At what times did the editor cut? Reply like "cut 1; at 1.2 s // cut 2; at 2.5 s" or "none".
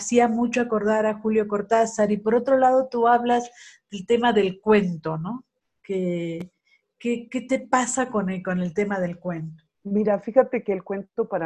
none